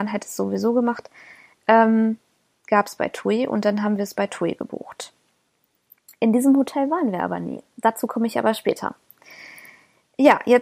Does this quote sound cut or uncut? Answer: uncut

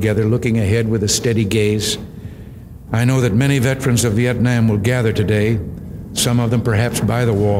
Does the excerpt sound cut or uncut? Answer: cut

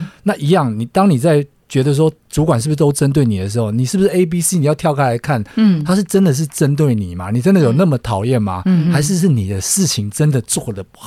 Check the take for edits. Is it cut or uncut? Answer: uncut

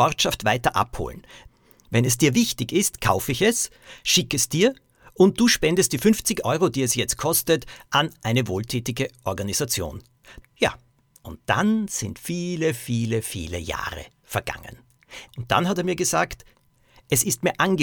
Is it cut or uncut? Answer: cut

